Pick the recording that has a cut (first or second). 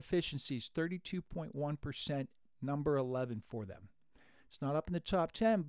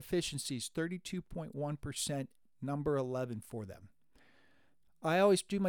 first